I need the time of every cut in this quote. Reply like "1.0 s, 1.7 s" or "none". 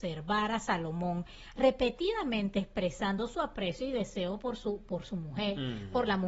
none